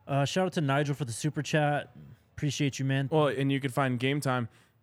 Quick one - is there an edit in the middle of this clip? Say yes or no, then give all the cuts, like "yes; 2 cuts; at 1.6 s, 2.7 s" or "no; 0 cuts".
yes; 1 cut; at 3.1 s